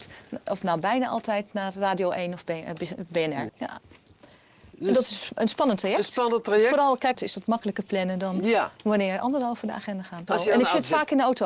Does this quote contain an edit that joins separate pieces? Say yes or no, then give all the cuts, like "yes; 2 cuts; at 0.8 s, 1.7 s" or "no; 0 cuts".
yes; 3 cuts; at 3.5 s, 7.1 s, 10.3 s